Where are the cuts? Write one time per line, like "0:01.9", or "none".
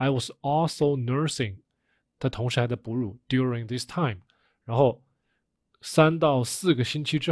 none